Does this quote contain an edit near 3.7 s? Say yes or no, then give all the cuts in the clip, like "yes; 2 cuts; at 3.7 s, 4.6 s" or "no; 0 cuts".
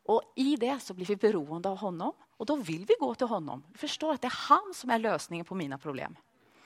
no; 0 cuts